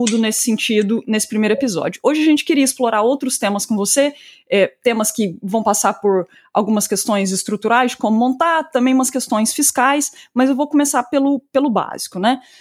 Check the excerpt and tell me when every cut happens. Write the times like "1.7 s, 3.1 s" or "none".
none